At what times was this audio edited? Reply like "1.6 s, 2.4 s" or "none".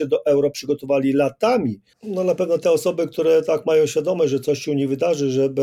1.9 s